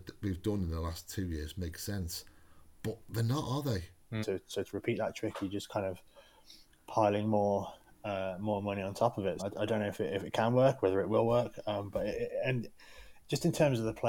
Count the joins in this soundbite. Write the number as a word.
two